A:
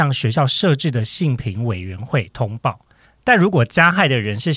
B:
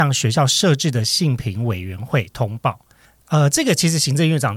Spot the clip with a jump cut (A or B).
B